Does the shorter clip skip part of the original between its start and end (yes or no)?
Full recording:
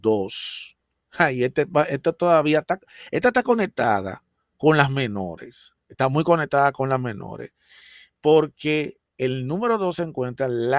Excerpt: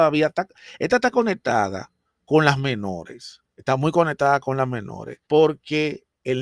yes